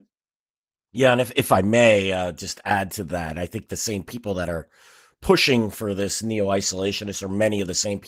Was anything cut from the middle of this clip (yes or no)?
no